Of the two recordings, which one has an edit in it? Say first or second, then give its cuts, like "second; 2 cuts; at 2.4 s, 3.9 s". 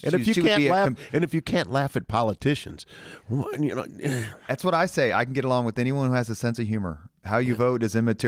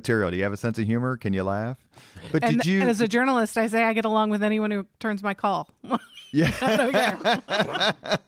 first; 1 cut; at 7.2 s